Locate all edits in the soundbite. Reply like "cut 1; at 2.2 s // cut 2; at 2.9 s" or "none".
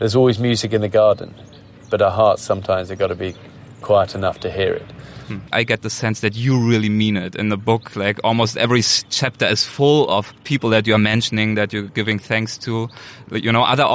cut 1; at 5.5 s // cut 2; at 10.4 s